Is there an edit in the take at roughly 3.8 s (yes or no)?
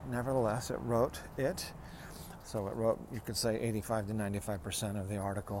no